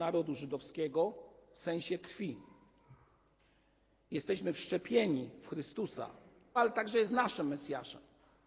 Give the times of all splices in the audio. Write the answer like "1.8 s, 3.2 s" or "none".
6.6 s